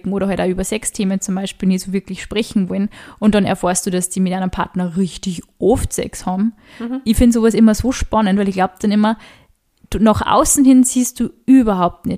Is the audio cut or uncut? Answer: uncut